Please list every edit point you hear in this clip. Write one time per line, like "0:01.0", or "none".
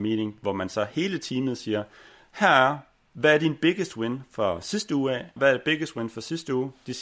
0:05.4